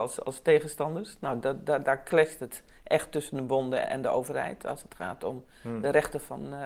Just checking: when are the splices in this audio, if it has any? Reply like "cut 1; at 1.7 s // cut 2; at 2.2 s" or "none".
cut 1; at 3.8 s